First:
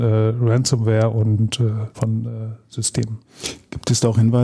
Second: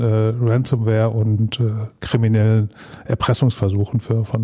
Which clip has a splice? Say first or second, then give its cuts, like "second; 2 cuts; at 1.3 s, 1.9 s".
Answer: first; 1 cut; at 1.9 s